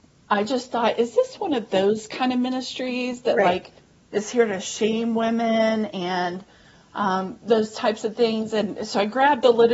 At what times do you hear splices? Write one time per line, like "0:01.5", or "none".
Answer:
none